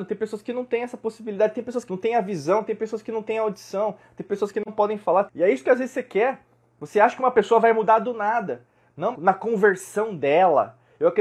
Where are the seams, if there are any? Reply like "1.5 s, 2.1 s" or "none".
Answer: 1.9 s, 5.3 s, 9.1 s